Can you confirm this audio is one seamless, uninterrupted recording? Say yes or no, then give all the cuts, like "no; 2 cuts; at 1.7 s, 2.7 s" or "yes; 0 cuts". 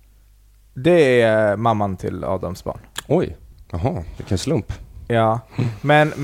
yes; 0 cuts